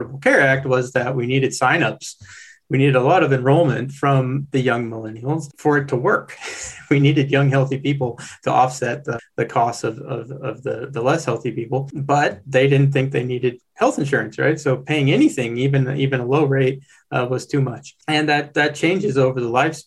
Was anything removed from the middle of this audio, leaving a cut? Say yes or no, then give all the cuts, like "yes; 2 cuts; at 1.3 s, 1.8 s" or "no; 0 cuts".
no; 0 cuts